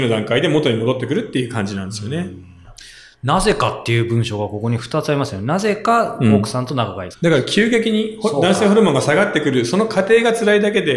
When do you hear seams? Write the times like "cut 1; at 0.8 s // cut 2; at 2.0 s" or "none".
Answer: cut 1; at 7.1 s